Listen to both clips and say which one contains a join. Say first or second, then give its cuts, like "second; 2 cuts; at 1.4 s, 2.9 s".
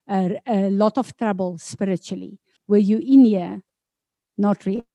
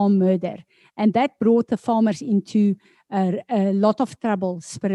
first; 1 cut; at 2.6 s